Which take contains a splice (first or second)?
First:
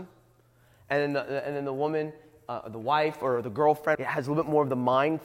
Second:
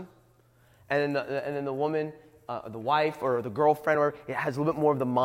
first